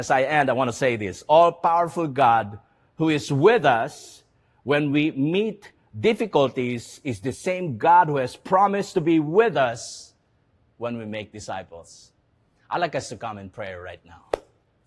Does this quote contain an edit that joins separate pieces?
no; 0 cuts

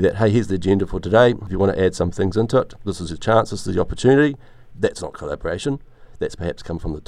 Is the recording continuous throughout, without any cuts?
no; 1 cut; at 4.7 s

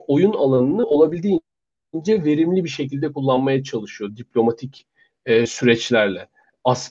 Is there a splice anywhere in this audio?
no; 0 cuts

